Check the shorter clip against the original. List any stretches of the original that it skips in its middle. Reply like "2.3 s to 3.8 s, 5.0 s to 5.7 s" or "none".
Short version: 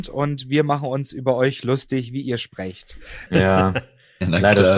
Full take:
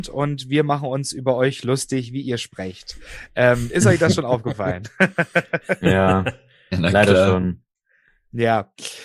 3.3 s to 5.8 s